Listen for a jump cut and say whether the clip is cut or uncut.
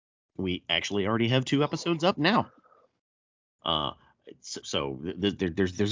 cut